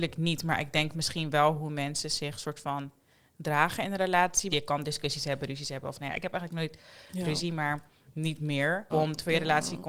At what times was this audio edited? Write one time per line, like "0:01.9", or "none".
0:04.5
0:08.9